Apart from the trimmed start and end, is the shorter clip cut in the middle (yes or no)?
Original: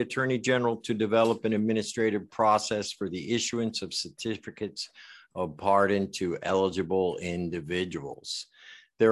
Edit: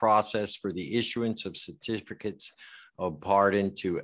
no